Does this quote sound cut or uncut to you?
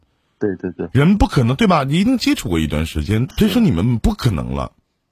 cut